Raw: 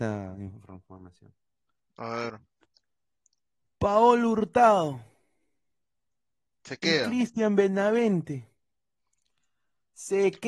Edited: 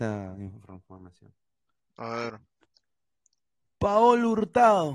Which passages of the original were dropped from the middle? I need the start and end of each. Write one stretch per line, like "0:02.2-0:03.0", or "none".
none

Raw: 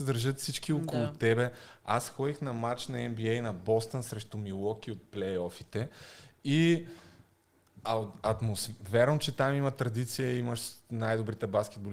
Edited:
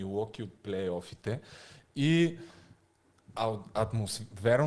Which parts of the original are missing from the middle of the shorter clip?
none

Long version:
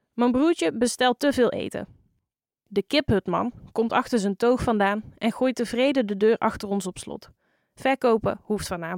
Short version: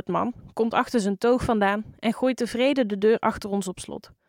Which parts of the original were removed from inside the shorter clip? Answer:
none

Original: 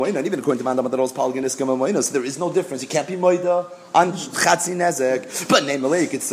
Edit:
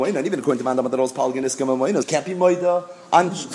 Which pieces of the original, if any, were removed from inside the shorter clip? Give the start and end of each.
0:02.0-0:02.8

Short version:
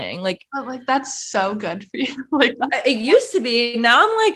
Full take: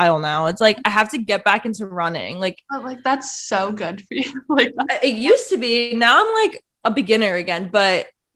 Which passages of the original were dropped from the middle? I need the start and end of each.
none

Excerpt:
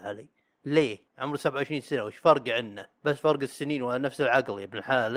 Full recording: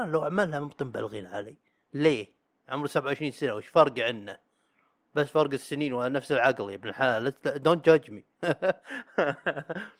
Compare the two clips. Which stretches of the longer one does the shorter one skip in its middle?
0:02.4-0:02.6
0:04.5-0:05.1

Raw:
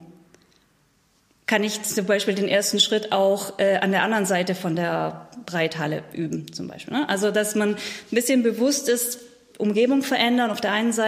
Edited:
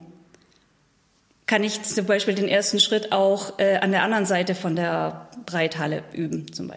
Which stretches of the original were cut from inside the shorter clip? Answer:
none

